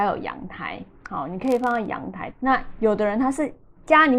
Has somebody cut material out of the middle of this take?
yes; 1 cut; at 2.3 s

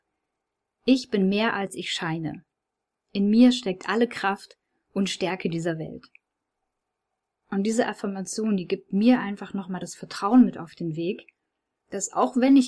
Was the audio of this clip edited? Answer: no; 0 cuts

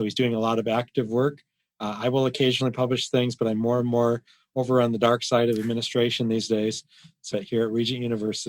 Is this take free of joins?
no; 1 cut; at 7.3 s

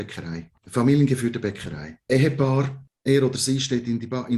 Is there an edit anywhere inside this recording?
yes; 1 cut; at 2.1 s

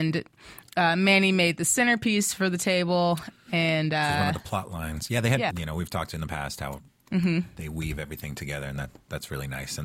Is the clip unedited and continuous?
no; 1 cut; at 5.5 s

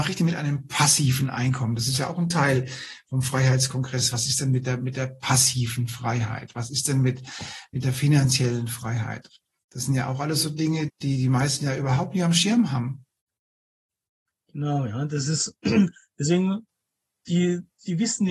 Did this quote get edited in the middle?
yes; 1 cut; at 10.9 s

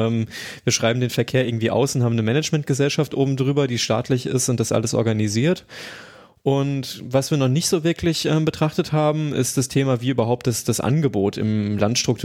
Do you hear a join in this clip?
no; 0 cuts

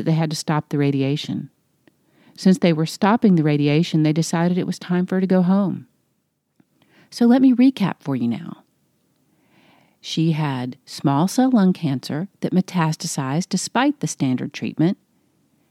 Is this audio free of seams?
yes; 0 cuts

